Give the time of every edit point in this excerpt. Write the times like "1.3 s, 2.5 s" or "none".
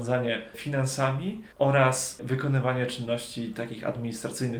1.5 s